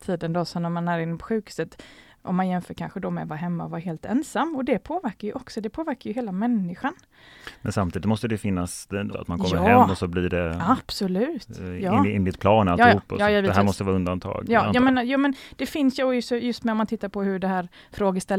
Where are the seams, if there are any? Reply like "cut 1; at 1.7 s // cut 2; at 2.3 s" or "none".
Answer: cut 1; at 9.1 s